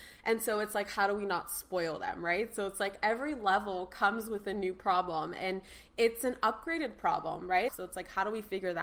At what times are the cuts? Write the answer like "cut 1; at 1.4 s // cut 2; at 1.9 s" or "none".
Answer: cut 1; at 7.7 s